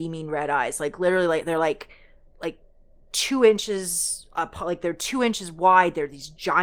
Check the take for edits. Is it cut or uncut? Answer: uncut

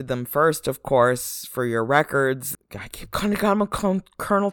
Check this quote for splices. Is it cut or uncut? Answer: cut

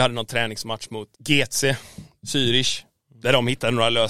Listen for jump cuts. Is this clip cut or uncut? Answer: cut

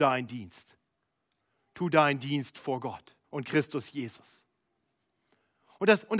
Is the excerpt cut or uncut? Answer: cut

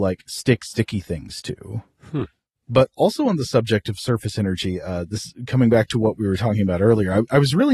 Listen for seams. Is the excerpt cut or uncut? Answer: uncut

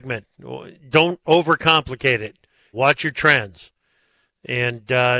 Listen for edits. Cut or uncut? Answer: cut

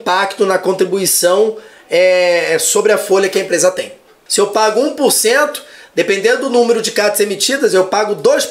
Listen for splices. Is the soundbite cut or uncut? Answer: cut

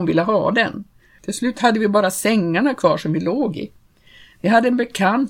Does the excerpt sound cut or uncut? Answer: cut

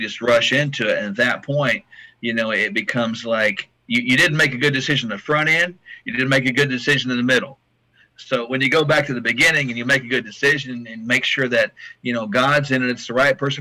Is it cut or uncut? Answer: uncut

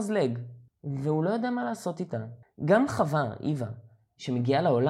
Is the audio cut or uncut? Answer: cut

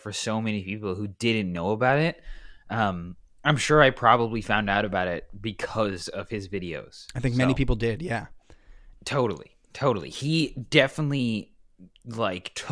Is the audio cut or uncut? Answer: cut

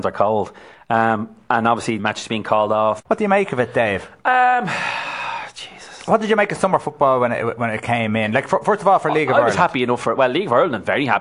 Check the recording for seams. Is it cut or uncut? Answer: cut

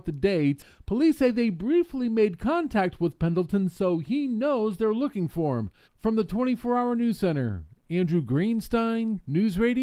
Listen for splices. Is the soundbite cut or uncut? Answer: cut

